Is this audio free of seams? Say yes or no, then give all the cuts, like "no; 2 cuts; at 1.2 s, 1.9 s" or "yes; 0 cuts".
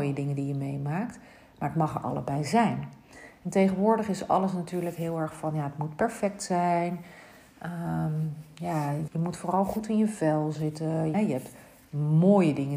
no; 2 cuts; at 9.1 s, 11.1 s